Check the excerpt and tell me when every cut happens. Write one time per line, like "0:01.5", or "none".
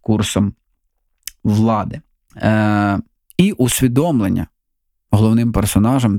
0:02.3